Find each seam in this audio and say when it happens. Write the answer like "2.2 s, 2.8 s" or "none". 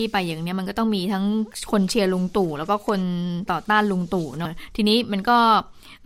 4.5 s